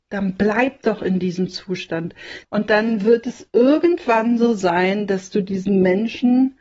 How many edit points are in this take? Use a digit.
1